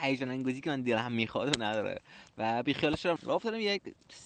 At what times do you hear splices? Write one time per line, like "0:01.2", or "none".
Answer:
0:03.2